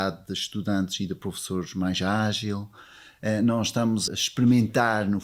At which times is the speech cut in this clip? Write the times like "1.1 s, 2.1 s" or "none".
4.1 s